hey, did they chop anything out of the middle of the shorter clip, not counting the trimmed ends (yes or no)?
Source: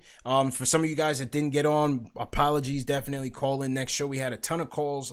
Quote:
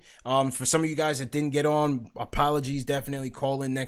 no